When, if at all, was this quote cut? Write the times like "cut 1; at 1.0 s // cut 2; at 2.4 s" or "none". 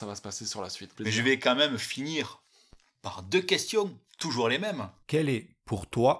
cut 1; at 0.9 s